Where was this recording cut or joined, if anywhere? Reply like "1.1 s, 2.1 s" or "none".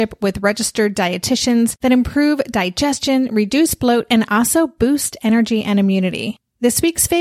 none